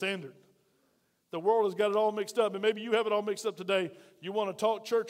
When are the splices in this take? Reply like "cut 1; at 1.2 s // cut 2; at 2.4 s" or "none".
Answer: none